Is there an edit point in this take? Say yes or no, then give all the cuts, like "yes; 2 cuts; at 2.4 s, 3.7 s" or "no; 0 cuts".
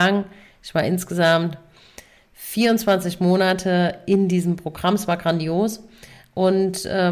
no; 0 cuts